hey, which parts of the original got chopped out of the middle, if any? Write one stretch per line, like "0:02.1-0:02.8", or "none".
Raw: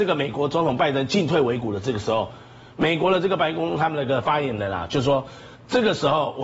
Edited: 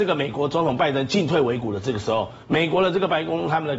0:02.4-0:02.7